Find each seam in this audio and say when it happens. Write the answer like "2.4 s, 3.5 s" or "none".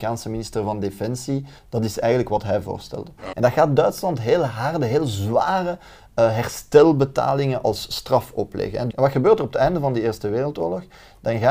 1.6 s, 3.3 s, 8.9 s